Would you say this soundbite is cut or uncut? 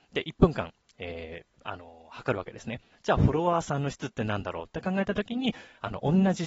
cut